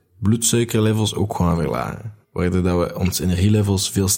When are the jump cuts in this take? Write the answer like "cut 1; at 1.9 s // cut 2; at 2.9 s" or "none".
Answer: cut 1; at 2.2 s